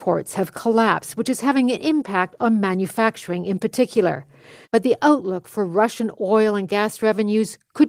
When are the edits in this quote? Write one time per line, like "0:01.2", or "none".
0:04.6